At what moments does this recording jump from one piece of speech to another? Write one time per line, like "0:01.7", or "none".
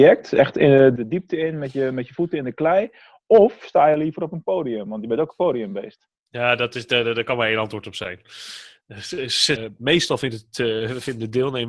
0:09.6